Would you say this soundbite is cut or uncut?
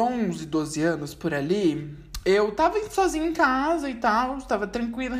uncut